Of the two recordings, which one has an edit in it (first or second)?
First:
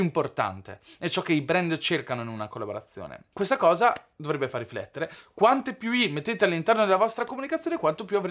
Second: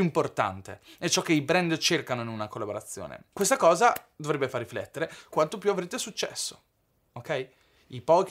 second